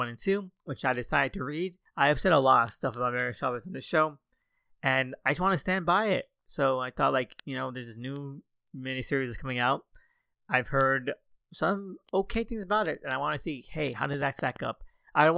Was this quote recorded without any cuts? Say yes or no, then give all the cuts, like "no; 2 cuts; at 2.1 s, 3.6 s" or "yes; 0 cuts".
yes; 0 cuts